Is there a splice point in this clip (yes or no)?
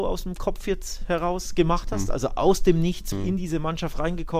yes